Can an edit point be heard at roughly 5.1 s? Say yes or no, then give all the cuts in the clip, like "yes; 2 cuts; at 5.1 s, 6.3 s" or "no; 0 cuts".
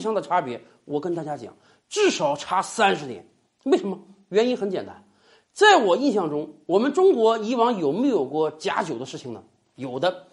no; 0 cuts